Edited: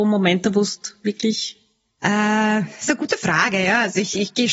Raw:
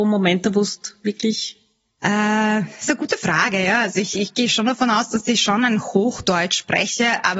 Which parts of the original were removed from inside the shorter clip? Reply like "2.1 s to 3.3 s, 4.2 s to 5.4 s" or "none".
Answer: none